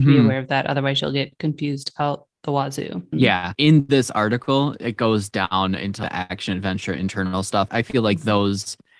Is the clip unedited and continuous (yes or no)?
no